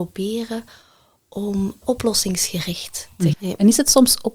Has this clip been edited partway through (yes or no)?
yes